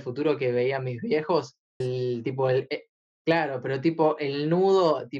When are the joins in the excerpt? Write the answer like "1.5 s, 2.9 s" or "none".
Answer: 1.8 s